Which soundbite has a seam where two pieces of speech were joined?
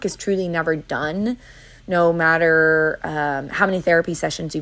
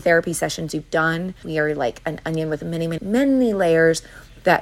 second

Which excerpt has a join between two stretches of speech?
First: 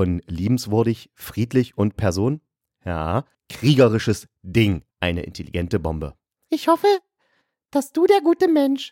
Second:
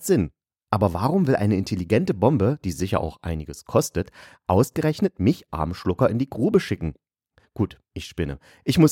first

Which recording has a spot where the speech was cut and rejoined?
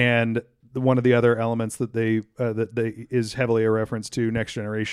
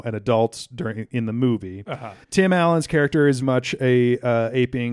second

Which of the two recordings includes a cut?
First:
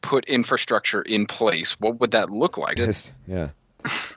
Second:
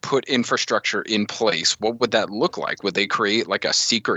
first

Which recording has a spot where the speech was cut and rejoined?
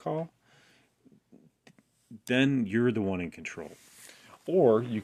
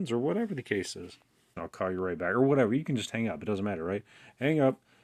second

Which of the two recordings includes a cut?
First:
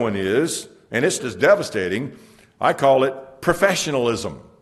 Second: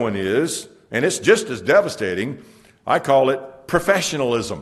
first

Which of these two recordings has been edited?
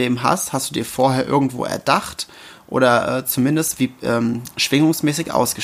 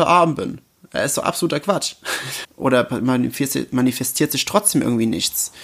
second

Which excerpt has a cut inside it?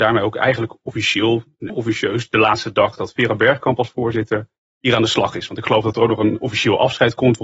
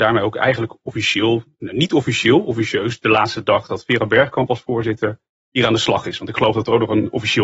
first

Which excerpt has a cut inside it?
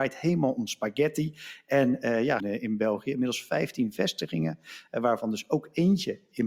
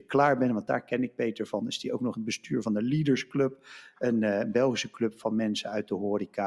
first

